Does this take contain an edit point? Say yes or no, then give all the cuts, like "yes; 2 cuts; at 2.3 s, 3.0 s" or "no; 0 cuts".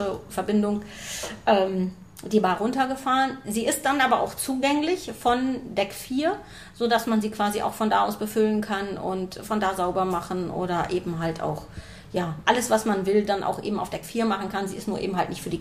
no; 0 cuts